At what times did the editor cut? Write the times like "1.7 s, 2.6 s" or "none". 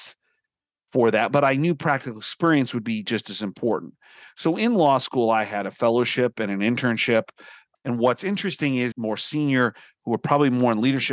7.8 s, 8.9 s